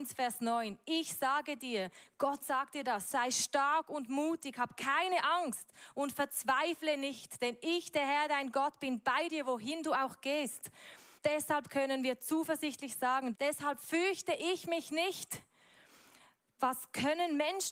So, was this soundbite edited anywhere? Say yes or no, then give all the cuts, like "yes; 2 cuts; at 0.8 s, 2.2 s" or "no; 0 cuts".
yes; 2 cuts; at 11.2 s, 13.3 s